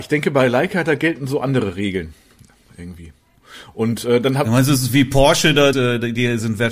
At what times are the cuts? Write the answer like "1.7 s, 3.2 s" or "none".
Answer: 5.7 s